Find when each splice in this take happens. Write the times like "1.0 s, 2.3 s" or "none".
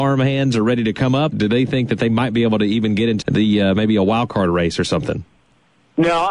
1.3 s, 3.2 s